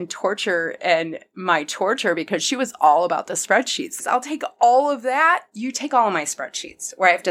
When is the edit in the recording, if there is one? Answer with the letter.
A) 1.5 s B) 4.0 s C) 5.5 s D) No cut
B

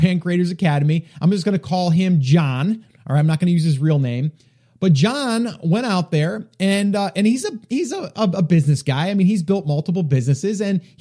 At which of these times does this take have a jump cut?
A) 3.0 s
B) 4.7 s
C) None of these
C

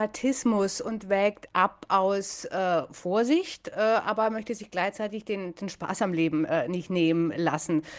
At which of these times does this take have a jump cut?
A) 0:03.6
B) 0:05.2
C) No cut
C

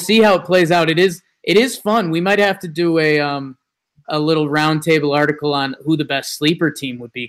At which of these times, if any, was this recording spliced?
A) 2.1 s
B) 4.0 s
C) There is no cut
B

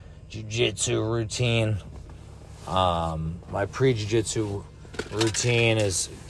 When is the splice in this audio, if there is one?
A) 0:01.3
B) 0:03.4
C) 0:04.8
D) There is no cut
B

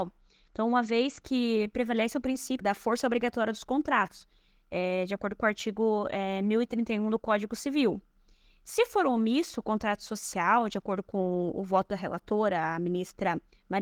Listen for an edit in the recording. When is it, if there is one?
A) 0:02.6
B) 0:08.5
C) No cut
A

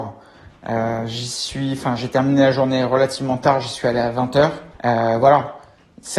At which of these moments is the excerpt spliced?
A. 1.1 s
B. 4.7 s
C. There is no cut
B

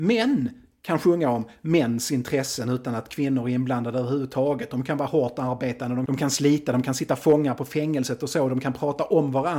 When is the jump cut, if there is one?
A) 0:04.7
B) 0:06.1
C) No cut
C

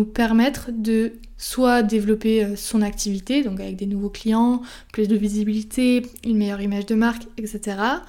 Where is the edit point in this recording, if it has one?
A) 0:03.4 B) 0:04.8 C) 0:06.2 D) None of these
D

